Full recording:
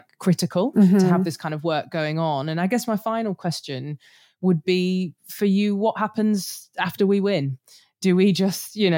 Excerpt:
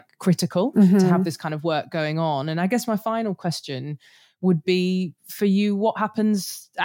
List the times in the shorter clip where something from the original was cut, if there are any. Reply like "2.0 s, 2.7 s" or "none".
none